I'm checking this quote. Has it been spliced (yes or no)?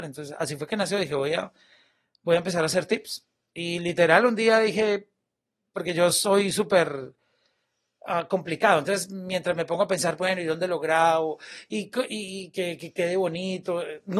no